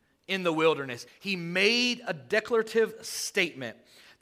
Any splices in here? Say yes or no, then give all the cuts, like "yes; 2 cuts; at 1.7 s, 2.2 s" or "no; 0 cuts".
yes; 1 cut; at 1.1 s